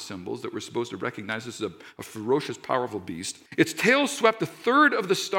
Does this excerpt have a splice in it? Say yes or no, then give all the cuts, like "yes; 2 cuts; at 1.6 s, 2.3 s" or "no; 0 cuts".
yes; 1 cut; at 3.5 s